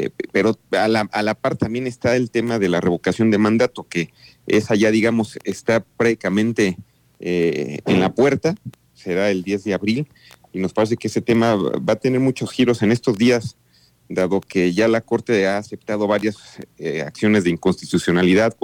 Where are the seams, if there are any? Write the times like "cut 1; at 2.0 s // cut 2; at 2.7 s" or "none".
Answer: none